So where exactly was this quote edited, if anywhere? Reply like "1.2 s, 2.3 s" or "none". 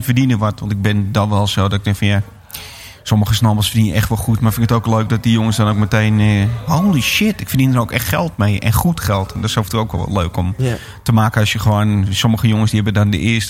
none